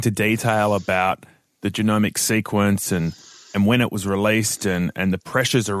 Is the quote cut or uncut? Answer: uncut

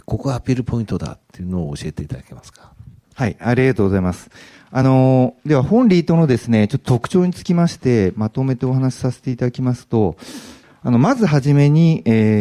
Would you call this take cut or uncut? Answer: uncut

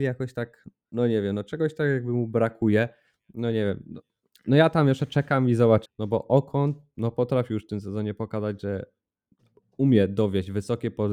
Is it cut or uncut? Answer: cut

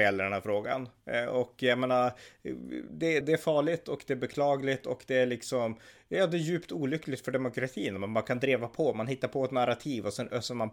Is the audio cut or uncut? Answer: cut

